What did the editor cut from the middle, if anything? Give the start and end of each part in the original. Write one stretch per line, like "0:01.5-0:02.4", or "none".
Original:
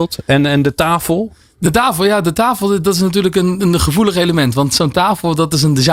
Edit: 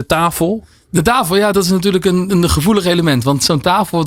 0:02.2-0:02.8